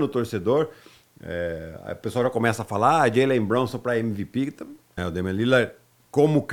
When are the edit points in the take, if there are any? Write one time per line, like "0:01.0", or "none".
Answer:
0:05.0